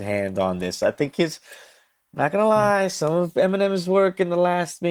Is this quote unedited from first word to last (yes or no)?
yes